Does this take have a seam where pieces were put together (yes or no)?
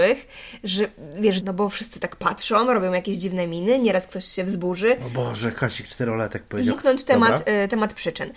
yes